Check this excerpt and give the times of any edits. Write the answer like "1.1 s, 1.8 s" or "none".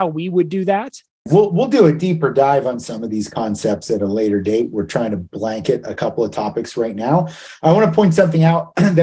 none